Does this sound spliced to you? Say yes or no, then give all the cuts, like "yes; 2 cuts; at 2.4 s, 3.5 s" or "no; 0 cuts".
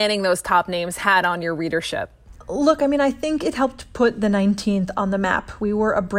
no; 0 cuts